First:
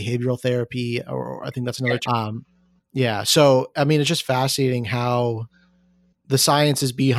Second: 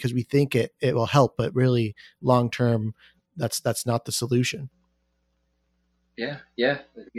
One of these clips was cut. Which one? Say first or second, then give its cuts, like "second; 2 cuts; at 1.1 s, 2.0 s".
first; 1 cut; at 2.1 s